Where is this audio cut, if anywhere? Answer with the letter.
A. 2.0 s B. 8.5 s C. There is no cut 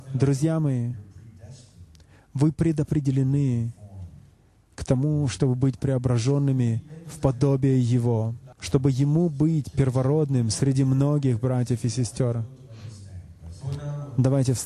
B